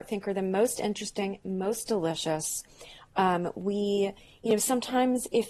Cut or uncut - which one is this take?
uncut